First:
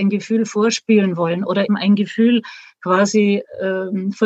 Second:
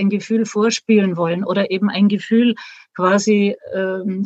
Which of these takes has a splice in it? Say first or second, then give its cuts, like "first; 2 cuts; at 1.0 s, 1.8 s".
first; 1 cut; at 1.7 s